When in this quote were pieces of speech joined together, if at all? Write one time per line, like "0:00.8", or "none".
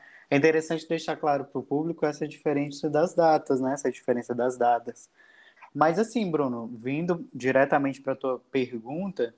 0:05.6